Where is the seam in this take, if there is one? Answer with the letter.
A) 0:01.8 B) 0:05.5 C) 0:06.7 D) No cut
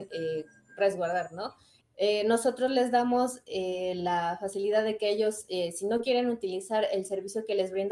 A